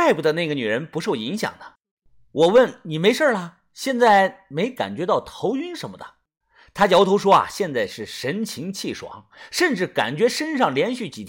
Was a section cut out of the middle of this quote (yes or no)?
no